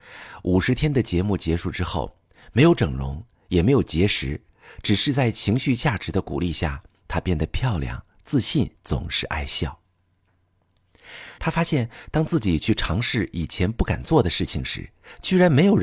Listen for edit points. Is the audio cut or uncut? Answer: cut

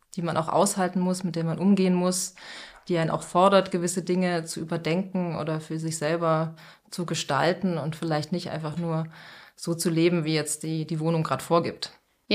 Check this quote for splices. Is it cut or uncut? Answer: uncut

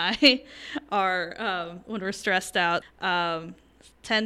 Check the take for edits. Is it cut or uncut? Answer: cut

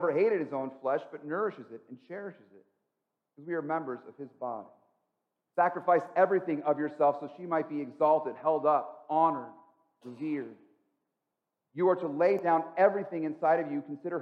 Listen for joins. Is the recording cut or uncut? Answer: cut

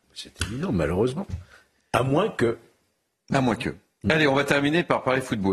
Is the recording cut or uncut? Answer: uncut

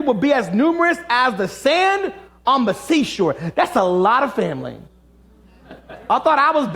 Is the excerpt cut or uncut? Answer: uncut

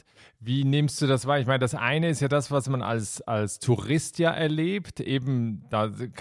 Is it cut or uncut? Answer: uncut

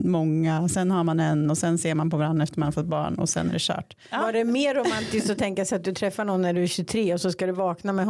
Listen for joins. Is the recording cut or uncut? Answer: uncut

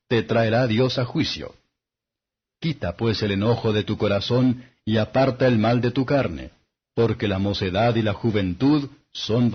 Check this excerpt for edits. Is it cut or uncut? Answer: uncut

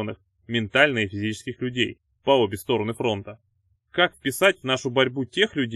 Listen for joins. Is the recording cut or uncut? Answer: cut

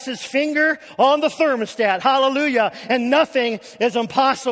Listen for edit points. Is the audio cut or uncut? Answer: uncut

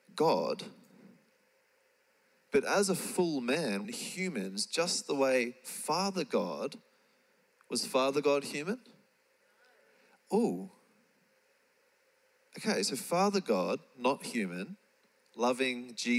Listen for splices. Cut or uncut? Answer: cut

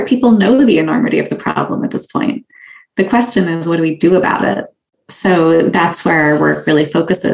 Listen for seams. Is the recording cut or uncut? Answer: uncut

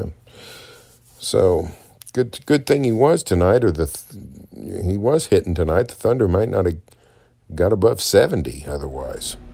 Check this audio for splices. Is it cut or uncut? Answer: uncut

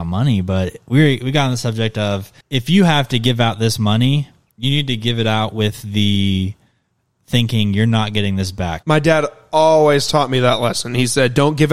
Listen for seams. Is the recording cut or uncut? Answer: cut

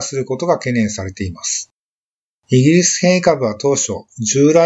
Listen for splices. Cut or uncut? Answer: uncut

